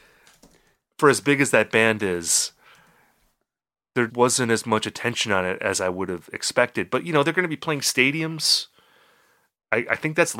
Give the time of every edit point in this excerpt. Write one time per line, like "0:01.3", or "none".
0:04.1